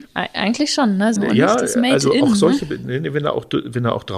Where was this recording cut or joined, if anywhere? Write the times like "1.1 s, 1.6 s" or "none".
1.2 s

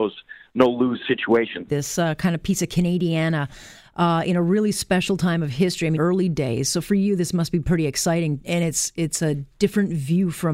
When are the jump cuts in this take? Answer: 1.7 s, 6.0 s, 8.4 s

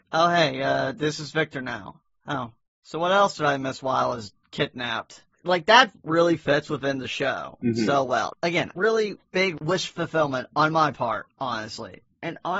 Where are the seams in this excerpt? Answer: none

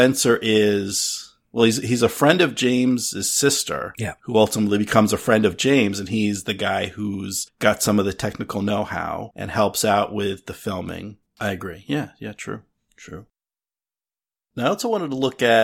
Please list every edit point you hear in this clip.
11.2 s

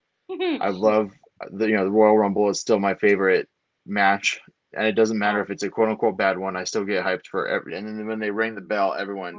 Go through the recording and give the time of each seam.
7.7 s

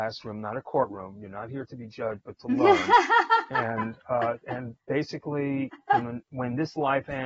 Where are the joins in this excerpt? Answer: none

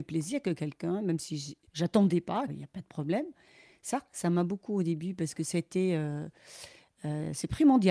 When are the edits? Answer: 2.5 s

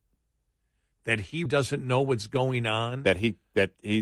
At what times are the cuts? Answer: 1.5 s

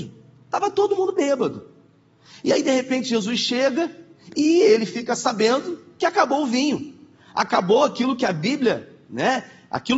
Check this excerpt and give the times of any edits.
none

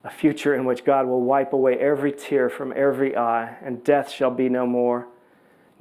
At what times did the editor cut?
none

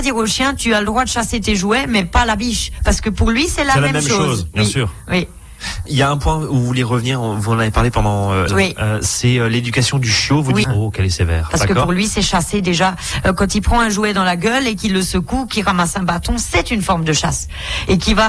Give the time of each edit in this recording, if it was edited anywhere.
5.9 s, 8.5 s, 10.6 s

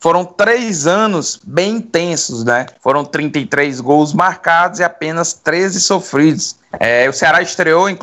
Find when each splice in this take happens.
2.8 s

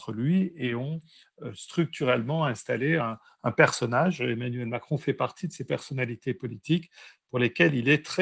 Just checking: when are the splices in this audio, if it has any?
none

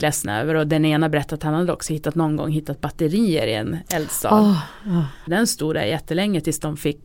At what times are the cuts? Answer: 5.3 s

